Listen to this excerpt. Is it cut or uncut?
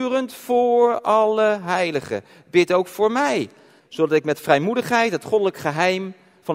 cut